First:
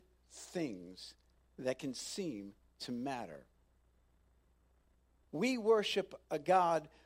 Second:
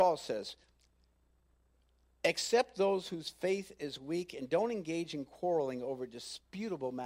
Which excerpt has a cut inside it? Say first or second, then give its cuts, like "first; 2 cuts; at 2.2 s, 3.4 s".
first; 1 cut; at 5.3 s